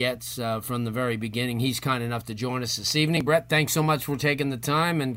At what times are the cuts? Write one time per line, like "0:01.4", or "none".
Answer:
none